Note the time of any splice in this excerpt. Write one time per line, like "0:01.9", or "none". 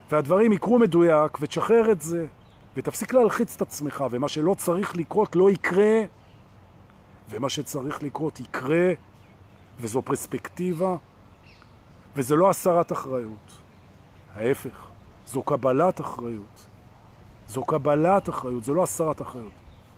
none